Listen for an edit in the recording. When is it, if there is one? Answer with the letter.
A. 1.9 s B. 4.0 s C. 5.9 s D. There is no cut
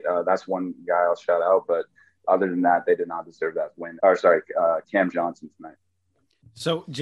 B